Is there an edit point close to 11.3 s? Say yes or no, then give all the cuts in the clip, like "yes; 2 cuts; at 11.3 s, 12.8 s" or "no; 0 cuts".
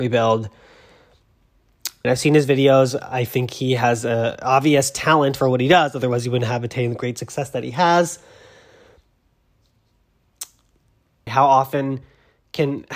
yes; 2 cuts; at 2.0 s, 11.3 s